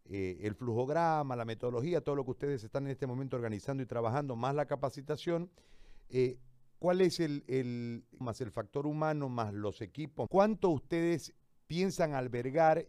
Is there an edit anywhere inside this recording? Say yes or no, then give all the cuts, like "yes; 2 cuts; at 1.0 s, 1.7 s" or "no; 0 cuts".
yes; 2 cuts; at 8.2 s, 10.3 s